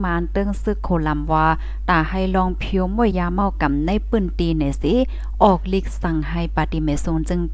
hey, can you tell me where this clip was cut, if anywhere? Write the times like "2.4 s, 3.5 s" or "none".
3.1 s